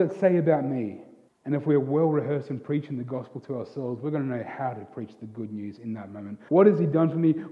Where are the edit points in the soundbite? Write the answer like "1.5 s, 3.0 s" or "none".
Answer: 1.3 s, 6.5 s